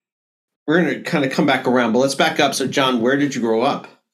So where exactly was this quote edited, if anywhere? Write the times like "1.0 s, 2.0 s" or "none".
none

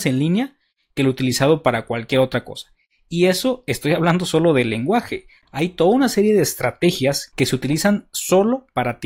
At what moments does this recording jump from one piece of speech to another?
none

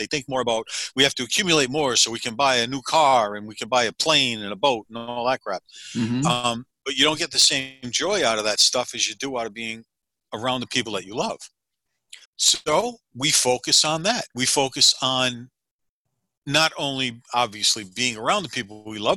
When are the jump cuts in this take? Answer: 12.2 s

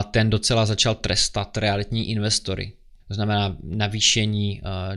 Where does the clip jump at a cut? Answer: 3.0 s

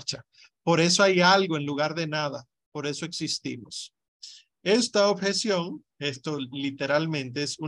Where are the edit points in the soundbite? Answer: none

